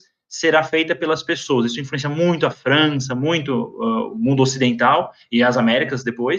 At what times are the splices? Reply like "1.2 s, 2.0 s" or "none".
none

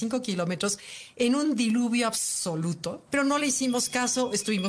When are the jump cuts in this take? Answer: 3.1 s

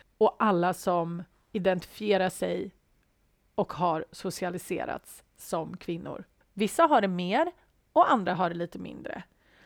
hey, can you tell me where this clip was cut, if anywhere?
6.4 s

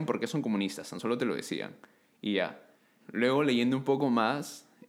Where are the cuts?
3.0 s

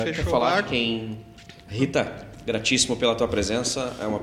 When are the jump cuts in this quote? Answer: 1.7 s

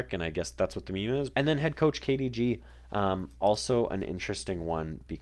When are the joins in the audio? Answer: 1.3 s

